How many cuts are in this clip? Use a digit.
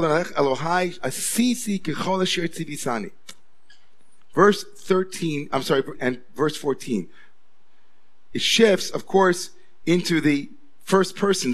1